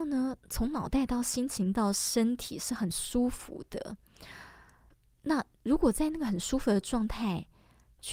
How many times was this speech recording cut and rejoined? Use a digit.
0